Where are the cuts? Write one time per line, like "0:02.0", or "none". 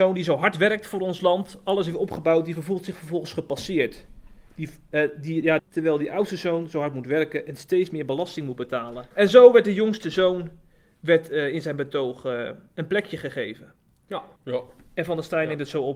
0:05.6
0:09.1
0:14.4